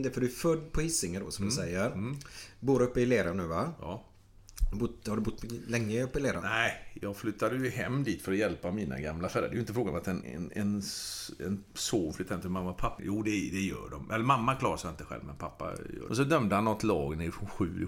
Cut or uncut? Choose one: cut